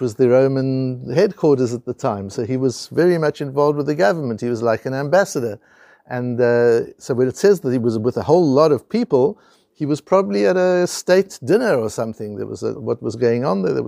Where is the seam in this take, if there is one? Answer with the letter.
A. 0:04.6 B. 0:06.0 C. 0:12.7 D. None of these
C